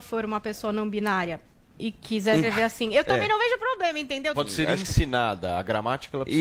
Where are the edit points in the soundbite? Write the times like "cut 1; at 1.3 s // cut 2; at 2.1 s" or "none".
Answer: cut 1; at 2.4 s // cut 2; at 4.3 s